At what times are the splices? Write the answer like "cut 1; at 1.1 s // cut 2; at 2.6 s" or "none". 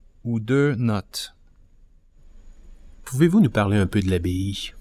cut 1; at 2.9 s